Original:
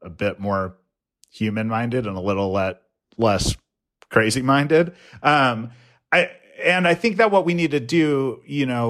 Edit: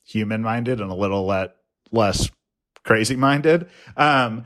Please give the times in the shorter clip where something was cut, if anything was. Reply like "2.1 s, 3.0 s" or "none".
none